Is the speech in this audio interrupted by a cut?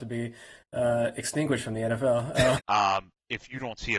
yes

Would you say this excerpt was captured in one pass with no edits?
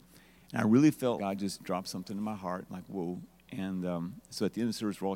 no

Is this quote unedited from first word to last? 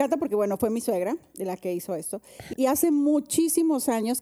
no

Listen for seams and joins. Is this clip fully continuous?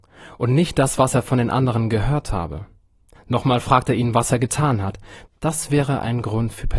no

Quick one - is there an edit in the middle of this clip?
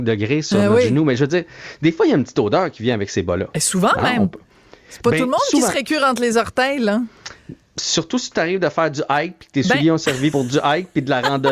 yes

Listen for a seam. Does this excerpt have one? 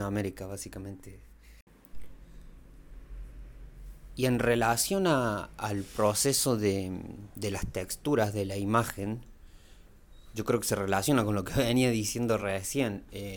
no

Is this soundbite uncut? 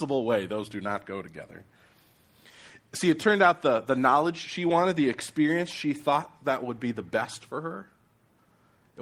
yes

